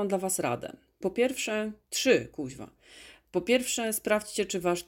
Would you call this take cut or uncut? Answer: cut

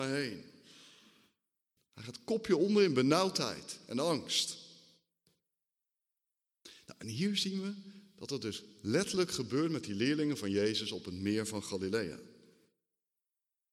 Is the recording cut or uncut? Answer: cut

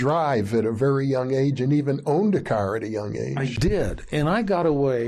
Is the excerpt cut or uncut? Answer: uncut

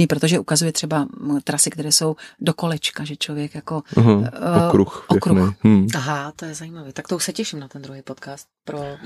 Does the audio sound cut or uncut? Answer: uncut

